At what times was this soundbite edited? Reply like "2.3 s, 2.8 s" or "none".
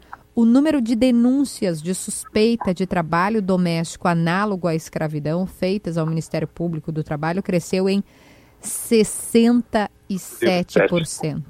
none

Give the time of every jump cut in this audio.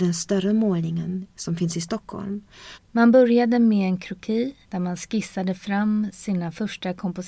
2.7 s, 4.6 s

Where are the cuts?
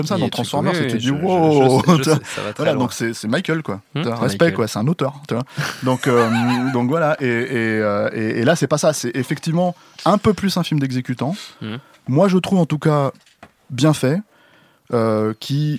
none

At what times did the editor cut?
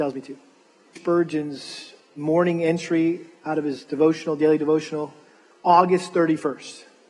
1.0 s

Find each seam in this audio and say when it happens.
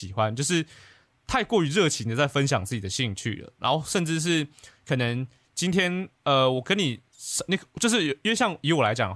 6.1 s

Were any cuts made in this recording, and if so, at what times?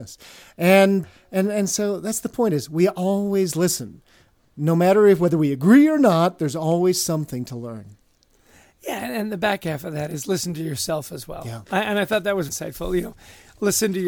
1.0 s, 12.5 s

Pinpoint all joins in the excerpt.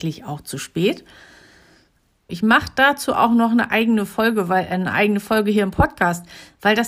2.3 s

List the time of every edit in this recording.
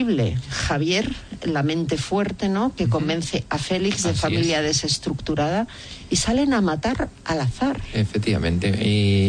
none

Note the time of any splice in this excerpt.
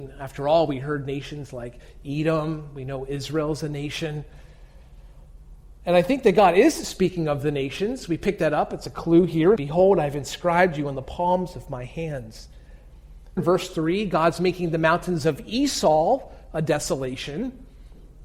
9.6 s, 13.4 s

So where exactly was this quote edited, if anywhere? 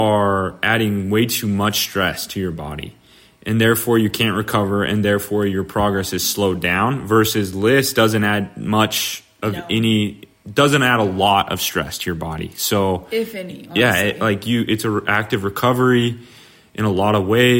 none

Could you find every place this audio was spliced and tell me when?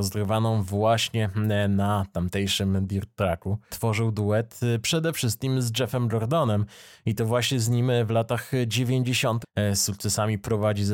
3.7 s, 9.4 s

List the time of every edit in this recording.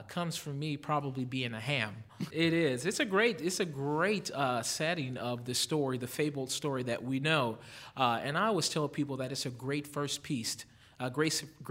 2.3 s

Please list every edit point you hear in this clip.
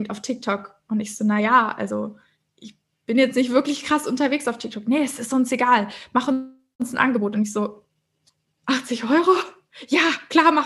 none

